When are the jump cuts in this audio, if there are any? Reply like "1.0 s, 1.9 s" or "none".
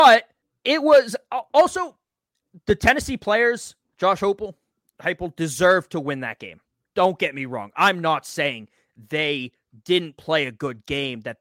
none